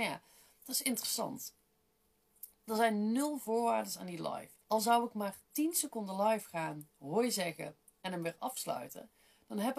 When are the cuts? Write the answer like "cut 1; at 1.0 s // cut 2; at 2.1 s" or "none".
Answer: cut 1; at 4.6 s

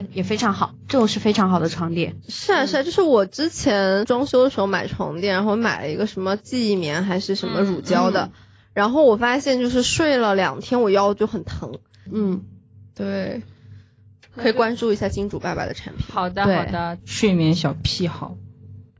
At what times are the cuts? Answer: cut 1; at 12.1 s // cut 2; at 17.0 s

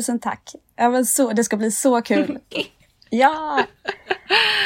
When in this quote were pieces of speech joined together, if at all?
cut 1; at 2.5 s

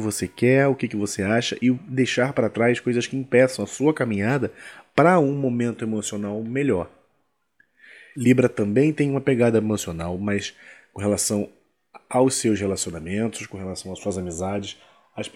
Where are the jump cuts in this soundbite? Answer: cut 1; at 8.1 s

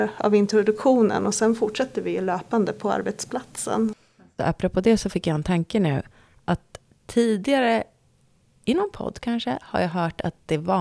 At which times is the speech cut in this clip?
none

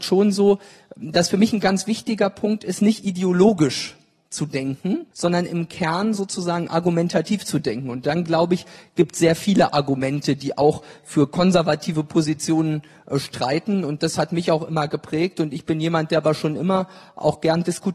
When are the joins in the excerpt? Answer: cut 1; at 5.1 s

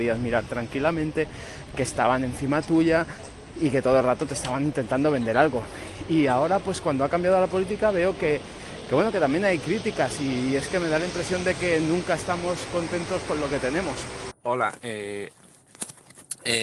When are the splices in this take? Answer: cut 1; at 14.3 s

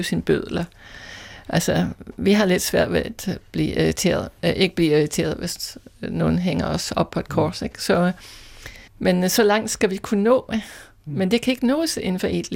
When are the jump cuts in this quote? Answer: cut 1; at 8.9 s

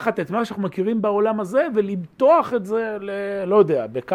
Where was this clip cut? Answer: none

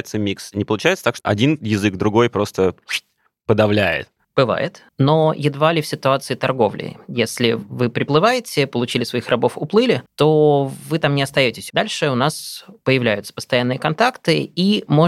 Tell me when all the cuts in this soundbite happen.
cut 1; at 1.2 s // cut 2; at 11.7 s

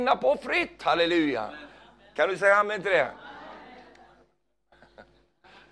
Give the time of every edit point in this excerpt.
none

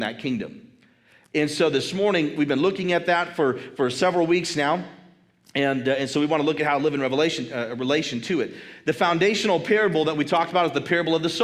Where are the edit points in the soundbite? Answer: none

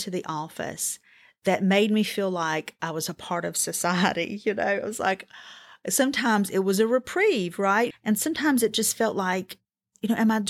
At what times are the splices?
cut 1; at 7.9 s

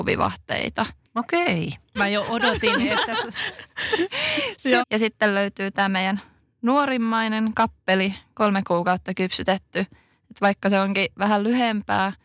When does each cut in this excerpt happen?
cut 1; at 1.9 s // cut 2; at 4.8 s

